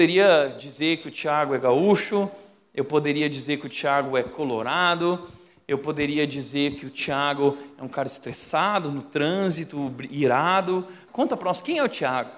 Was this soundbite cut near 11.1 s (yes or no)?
yes